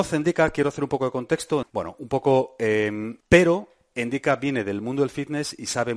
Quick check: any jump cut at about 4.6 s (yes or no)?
no